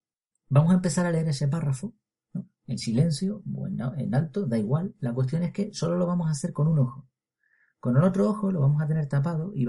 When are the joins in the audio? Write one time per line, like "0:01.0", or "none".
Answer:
none